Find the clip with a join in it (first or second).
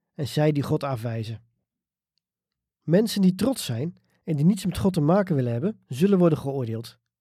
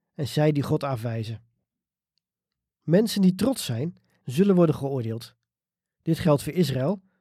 second